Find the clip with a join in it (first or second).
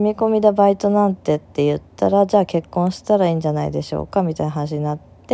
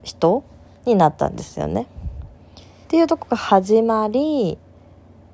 second